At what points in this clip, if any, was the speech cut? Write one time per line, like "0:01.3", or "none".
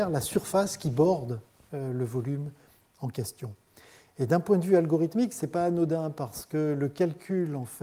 none